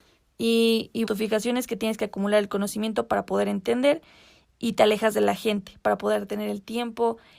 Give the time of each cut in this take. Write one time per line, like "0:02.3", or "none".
0:01.1

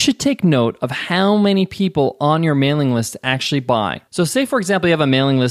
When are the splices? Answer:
0:04.1

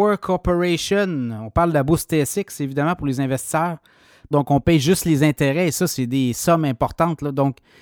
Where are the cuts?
0:04.3

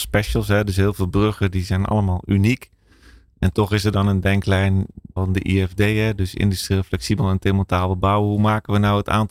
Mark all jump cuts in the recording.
0:05.2

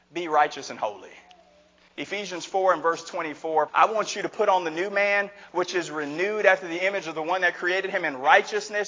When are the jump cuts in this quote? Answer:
0:03.7

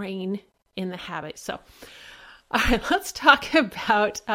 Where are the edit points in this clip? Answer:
0:01.3

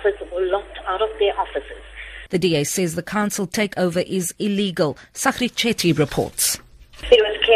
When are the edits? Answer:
0:02.3

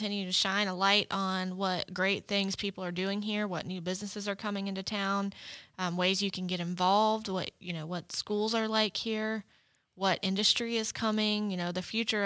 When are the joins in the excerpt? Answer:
none

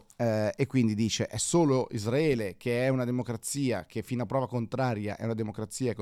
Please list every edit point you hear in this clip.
none

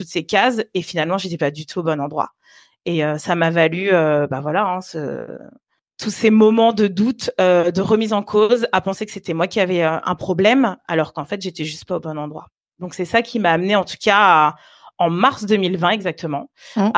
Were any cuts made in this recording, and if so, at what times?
none

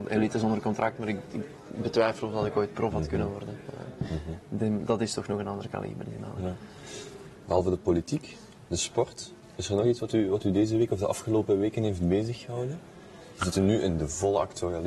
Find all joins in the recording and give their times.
none

